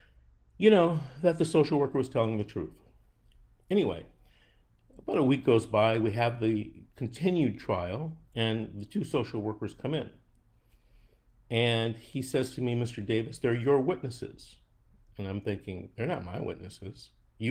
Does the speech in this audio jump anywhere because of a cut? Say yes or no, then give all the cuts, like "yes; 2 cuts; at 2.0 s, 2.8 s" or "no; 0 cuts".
no; 0 cuts